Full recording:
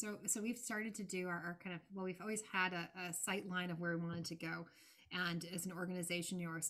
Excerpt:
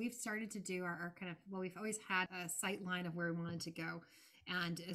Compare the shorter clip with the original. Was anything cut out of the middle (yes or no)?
yes